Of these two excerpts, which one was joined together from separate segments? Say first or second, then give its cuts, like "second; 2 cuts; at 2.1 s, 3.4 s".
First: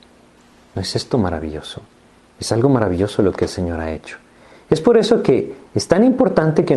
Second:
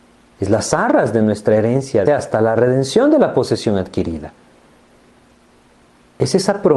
second; 1 cut; at 2.1 s